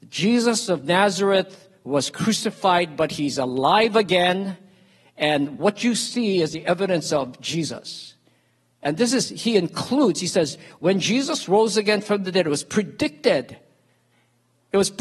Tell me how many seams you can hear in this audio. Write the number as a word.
zero